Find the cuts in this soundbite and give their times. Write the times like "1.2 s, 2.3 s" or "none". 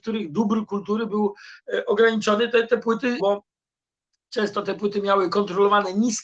3.2 s